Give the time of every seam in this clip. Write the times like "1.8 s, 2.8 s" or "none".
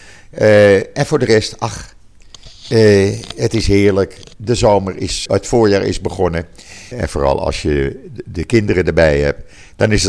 5.3 s, 6.9 s